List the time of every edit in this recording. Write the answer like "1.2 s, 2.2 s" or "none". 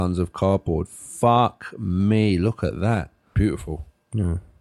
3.3 s